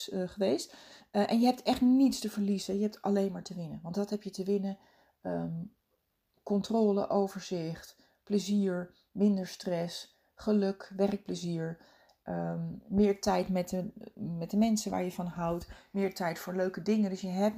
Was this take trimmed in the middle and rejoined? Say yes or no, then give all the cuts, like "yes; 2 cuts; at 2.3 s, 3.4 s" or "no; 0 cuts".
no; 0 cuts